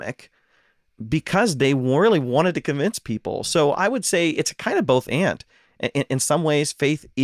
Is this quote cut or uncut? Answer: uncut